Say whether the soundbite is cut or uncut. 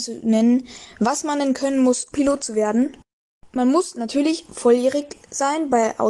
cut